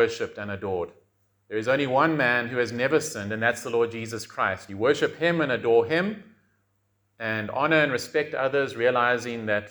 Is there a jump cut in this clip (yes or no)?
no